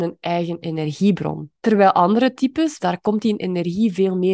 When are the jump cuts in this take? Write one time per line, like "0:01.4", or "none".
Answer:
0:01.6
0:02.8